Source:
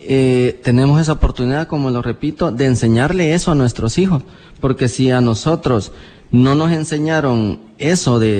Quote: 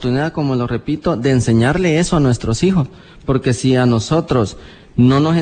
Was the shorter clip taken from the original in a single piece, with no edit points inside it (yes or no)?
yes